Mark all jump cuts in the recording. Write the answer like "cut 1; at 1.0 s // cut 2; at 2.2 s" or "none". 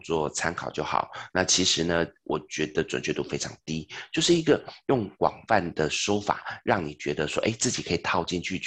cut 1; at 1.3 s